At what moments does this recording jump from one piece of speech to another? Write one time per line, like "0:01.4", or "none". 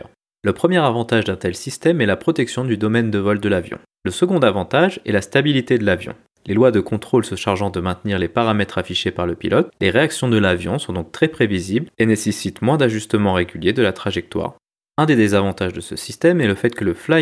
0:03.9